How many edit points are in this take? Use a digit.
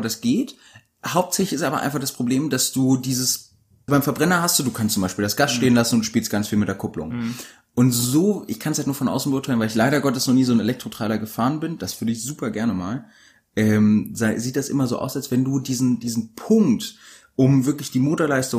1